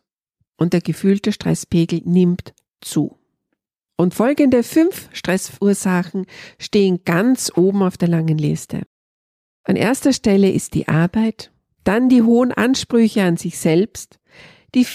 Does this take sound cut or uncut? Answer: uncut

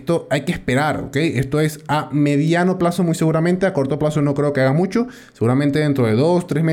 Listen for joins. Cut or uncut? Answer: uncut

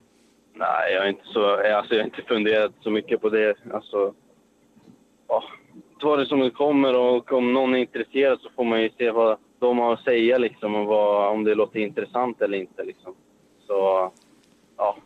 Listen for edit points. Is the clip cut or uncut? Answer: cut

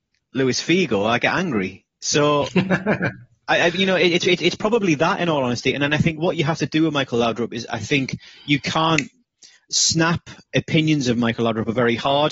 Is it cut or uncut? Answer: uncut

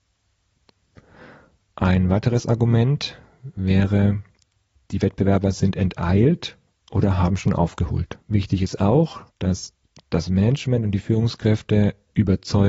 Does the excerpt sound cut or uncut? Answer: cut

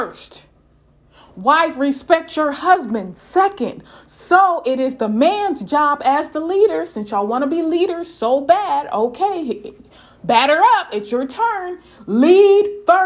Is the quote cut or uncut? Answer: uncut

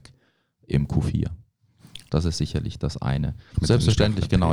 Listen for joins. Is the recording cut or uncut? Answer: cut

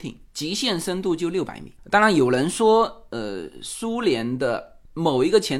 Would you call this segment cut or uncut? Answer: uncut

